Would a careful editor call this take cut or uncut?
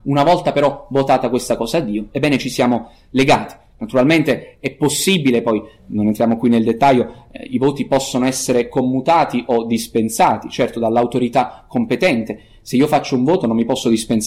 uncut